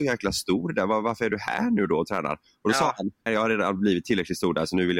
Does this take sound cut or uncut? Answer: cut